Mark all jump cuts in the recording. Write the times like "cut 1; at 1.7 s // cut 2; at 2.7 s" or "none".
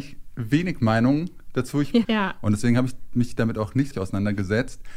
cut 1; at 2.0 s // cut 2; at 3.9 s